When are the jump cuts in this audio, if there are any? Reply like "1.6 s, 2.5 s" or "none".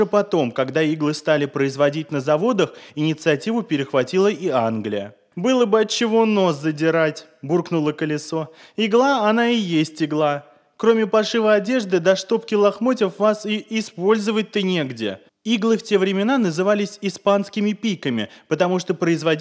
15.3 s